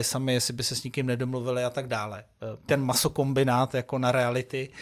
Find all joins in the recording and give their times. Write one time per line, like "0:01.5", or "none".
0:02.7